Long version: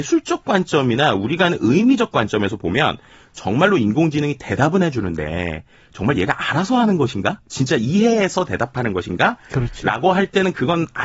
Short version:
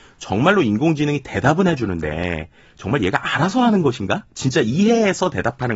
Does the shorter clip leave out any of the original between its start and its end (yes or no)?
no